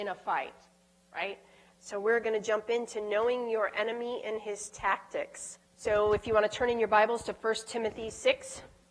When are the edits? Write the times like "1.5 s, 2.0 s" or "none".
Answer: 1.8 s, 5.7 s